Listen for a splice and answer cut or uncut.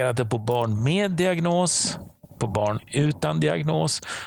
uncut